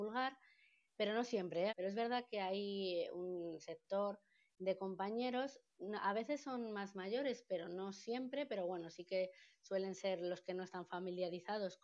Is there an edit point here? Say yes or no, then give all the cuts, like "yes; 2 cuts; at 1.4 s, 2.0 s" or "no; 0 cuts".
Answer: yes; 1 cut; at 1.7 s